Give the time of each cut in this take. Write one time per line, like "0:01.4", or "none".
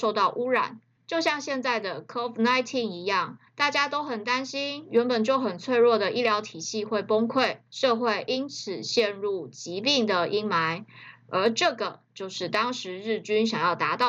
0:03.5
0:07.7

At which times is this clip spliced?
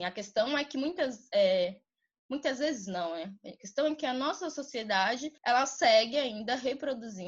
0:05.4

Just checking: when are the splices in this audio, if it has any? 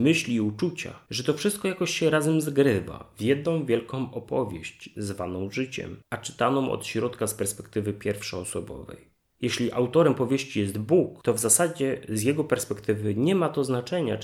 none

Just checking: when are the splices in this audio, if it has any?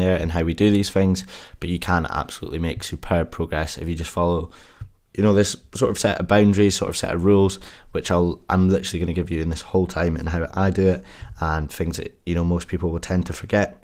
none

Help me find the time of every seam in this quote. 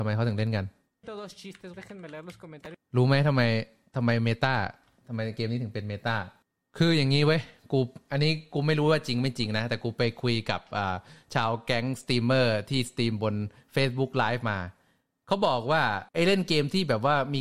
0:01.7
0:02.8
0:16.1

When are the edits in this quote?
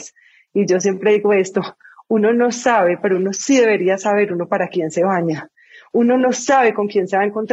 none

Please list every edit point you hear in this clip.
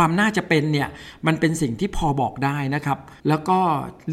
0:03.2

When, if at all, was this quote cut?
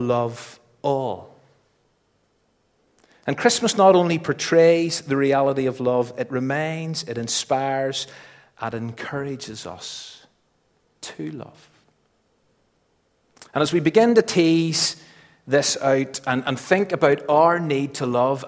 none

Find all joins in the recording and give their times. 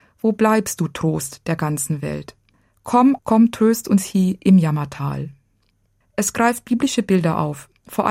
0:03.2
0:06.0

